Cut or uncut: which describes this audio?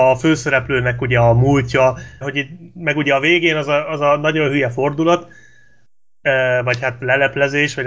cut